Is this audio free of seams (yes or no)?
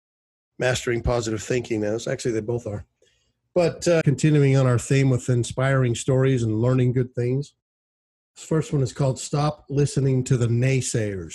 no